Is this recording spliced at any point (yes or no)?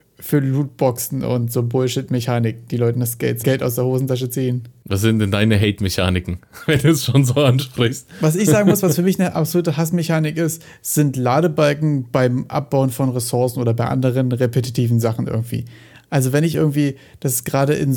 yes